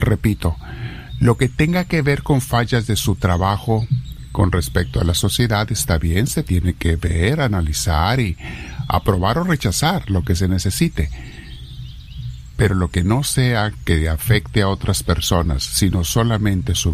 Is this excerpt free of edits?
yes; 0 cuts

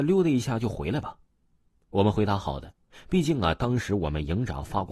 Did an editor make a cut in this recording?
no; 0 cuts

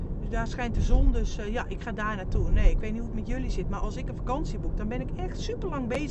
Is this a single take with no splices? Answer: yes; 0 cuts

